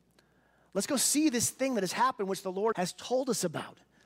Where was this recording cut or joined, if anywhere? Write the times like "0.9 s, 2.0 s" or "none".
2.7 s